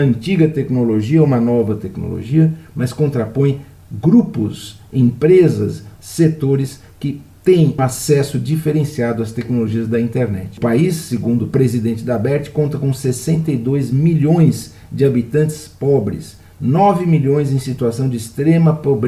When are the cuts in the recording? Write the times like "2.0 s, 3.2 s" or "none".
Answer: 7.8 s